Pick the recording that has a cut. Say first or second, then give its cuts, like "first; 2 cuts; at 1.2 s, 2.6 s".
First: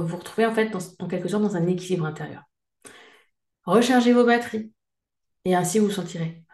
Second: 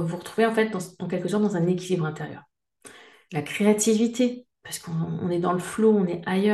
second; 1 cut; at 3.3 s